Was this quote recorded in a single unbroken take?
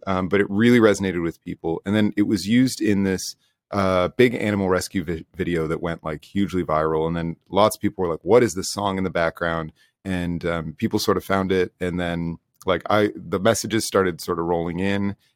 yes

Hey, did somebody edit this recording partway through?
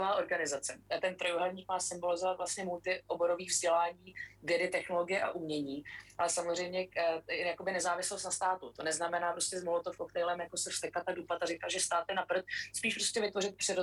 no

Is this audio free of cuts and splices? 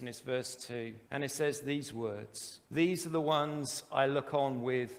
no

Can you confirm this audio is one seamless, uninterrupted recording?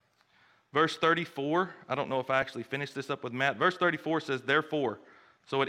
yes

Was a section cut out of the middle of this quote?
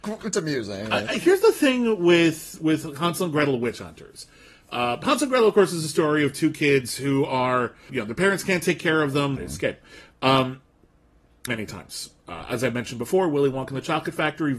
yes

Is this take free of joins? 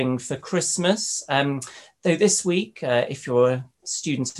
yes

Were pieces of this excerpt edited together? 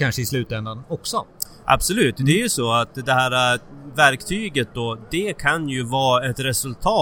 no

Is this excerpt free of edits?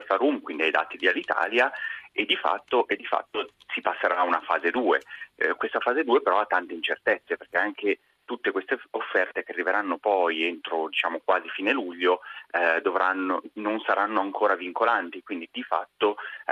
yes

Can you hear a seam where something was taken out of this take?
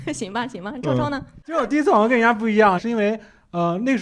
yes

